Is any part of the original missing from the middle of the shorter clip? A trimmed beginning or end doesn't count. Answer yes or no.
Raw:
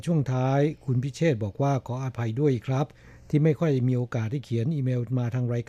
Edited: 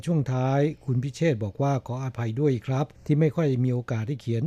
yes